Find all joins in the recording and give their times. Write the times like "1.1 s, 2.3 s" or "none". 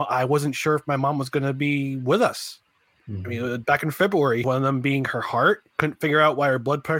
4.4 s, 5.7 s